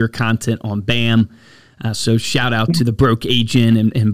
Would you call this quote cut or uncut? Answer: uncut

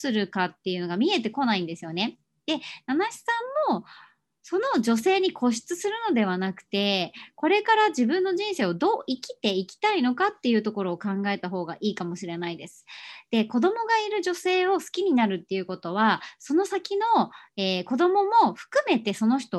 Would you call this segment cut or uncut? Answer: uncut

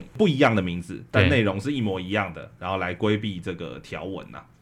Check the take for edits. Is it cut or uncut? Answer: uncut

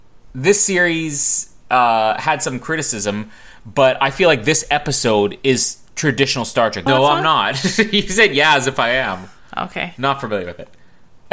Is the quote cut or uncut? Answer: cut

